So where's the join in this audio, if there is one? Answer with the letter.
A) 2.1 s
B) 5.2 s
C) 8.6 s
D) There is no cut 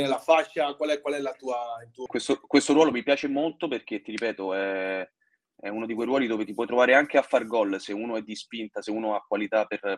A